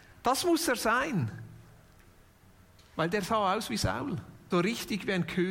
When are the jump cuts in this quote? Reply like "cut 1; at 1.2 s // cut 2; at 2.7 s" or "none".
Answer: cut 1; at 4.5 s